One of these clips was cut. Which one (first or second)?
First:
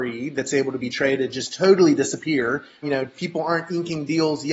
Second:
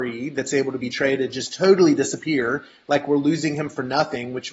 first